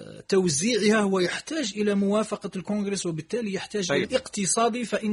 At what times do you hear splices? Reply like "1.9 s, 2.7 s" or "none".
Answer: 4.0 s